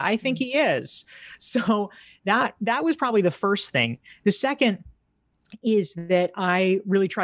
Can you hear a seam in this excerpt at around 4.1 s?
no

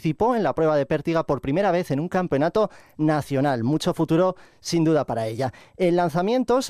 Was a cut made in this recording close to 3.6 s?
no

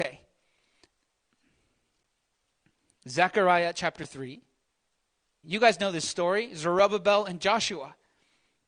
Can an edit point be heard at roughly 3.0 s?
no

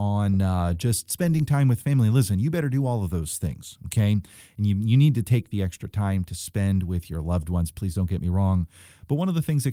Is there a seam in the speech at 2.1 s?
no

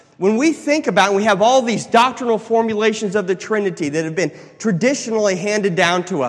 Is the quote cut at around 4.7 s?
no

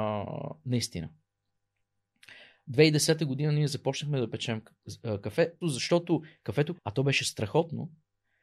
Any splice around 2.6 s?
no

